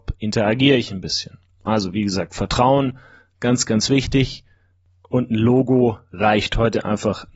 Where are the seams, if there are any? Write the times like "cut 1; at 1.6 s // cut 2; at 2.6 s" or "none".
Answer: none